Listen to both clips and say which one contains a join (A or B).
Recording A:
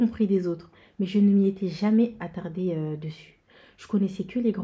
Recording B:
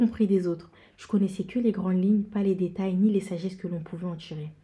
B